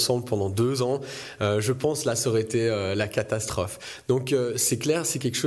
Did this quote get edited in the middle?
no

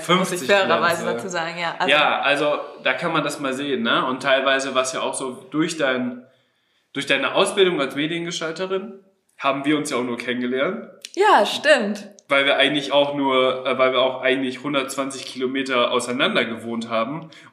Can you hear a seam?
no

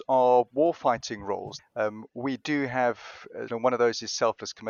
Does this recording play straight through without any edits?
no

